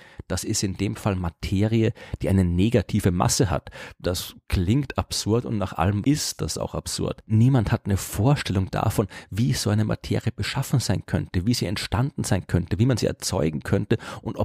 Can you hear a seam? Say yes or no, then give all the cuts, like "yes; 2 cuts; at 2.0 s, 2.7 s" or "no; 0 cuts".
yes; 1 cut; at 6.0 s